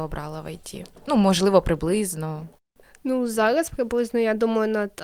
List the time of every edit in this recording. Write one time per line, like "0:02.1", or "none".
none

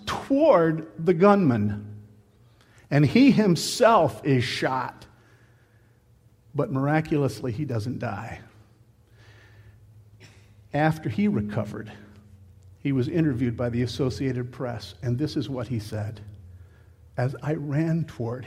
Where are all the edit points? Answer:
none

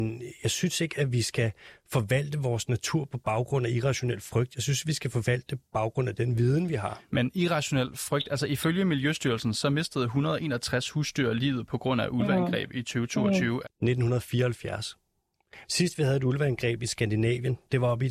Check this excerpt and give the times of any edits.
0:13.6
0:15.6

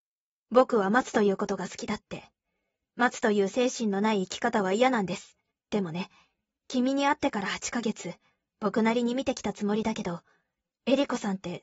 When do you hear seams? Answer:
0:05.5

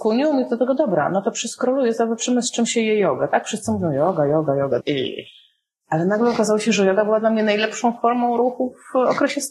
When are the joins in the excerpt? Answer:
0:04.8

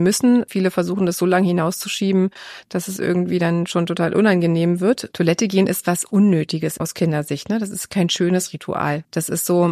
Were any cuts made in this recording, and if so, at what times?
none

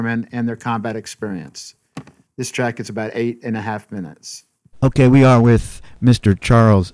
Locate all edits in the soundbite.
0:04.7

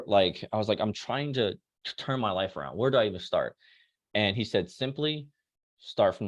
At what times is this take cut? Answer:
none

